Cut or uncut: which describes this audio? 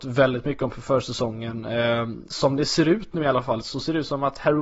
cut